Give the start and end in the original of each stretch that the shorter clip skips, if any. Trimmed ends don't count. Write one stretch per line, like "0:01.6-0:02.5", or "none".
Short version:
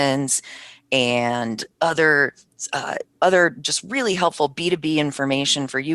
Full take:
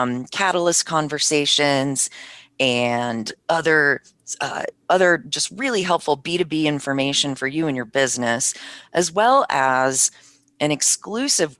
none